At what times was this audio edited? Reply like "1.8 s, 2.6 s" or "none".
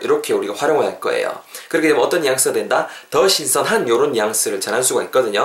none